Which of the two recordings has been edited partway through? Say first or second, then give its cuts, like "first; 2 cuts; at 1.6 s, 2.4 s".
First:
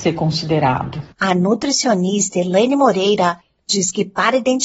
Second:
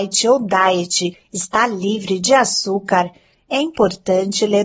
first; 1 cut; at 1.1 s